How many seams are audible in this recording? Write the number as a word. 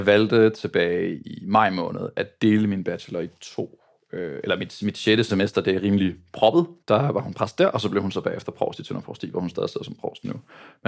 two